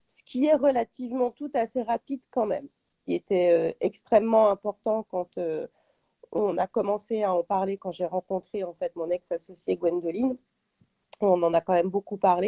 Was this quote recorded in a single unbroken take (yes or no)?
no